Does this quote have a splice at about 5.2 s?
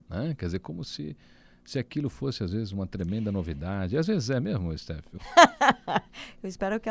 yes; 1 cut; at 5.2 s

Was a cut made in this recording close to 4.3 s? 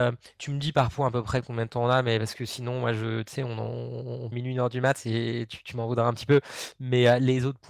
yes; 1 cut; at 4.3 s

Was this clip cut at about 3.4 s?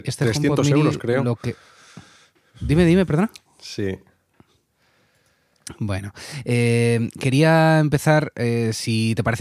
yes; 1 cut; at 3.4 s

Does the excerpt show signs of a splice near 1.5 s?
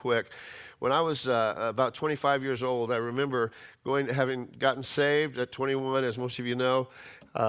no; 0 cuts

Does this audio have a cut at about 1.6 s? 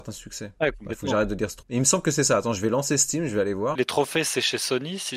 yes; 2 cuts; at 1.6 s, 3.7 s

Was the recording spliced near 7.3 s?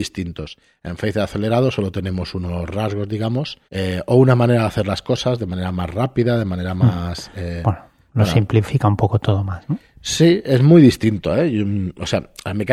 no; 1 cut; at 3.6 s

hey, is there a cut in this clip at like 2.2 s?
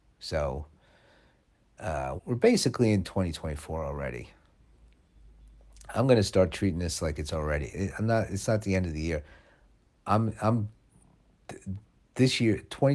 yes; 1 cut; at 2.2 s

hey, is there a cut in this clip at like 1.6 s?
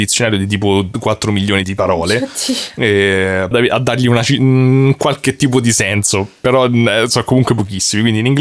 yes; 2 cuts; at 1.6 s, 3.5 s

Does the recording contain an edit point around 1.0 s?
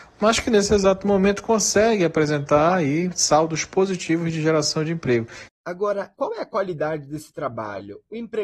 no; 1 cut; at 6.2 s

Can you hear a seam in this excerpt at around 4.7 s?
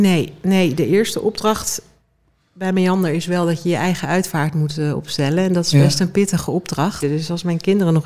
no; 1 cut; at 7.0 s

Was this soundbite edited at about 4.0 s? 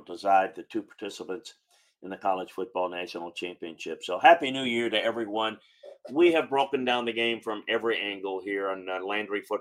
no; 0 cuts

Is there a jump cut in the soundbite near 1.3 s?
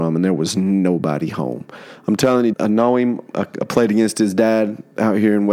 no; 1 cut; at 2.5 s

